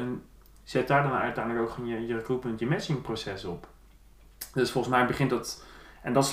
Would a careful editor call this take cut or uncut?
uncut